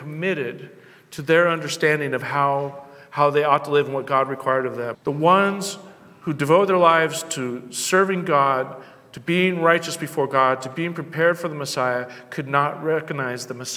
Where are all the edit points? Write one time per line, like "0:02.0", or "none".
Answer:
0:04.9